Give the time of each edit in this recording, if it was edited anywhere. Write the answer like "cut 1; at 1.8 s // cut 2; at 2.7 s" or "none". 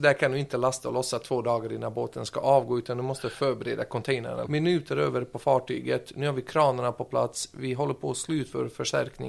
cut 1; at 4.5 s